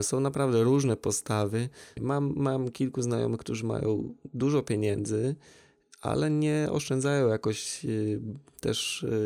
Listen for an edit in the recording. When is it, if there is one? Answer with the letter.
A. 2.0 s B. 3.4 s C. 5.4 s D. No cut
A